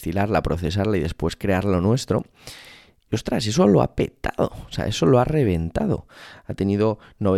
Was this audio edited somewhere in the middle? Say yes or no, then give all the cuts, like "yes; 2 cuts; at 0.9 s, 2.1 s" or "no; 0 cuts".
no; 0 cuts